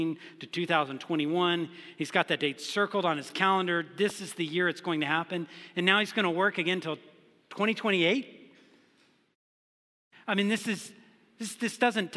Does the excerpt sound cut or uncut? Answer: uncut